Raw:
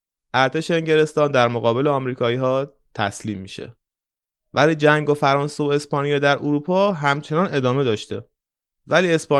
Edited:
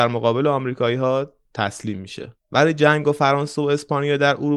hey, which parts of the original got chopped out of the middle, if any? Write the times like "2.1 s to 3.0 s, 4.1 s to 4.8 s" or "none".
3.8 s to 4.4 s